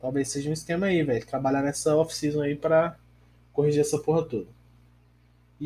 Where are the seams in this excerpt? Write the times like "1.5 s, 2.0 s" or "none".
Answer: none